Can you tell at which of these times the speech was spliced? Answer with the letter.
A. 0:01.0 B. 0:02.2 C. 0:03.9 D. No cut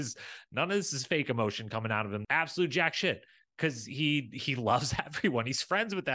B